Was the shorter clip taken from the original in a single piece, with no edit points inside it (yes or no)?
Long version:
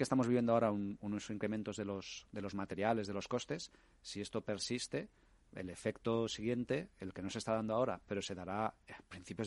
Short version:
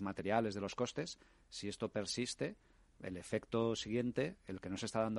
yes